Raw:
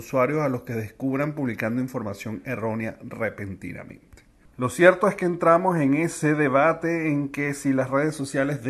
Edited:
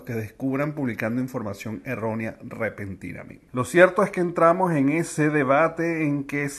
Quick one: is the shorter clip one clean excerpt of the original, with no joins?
no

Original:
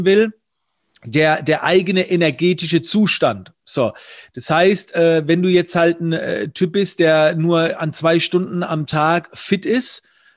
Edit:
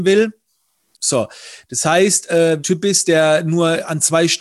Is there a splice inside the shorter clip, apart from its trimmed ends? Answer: yes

